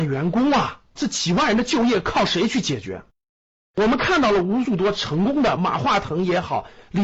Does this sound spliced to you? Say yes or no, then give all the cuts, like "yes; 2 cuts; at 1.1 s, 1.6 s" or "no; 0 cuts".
yes; 2 cuts; at 1.0 s, 5.6 s